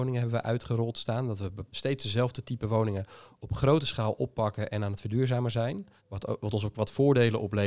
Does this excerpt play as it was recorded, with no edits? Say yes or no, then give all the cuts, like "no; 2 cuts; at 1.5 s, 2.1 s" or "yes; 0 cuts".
no; 2 cuts; at 1.7 s, 6.0 s